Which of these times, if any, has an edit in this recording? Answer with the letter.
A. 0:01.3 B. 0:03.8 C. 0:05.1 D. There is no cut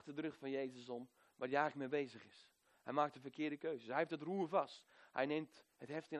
D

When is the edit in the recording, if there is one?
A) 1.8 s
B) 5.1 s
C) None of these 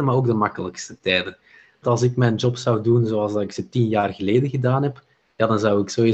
A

